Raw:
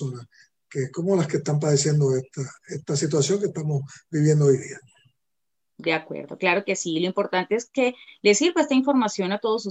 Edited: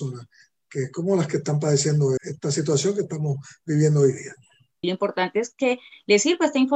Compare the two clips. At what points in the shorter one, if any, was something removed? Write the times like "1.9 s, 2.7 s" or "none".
2.2 s, 4.8 s